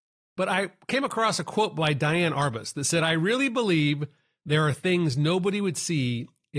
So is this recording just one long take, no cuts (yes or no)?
no